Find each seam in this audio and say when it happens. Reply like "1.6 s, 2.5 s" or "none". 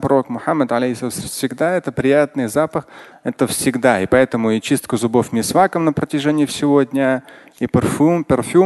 3.1 s